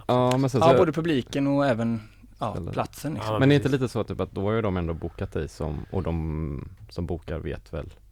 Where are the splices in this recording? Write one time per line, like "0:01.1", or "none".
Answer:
none